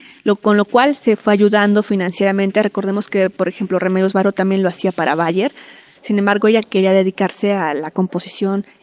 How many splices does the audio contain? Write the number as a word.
one